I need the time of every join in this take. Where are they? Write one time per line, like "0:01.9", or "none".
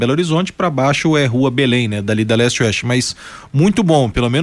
none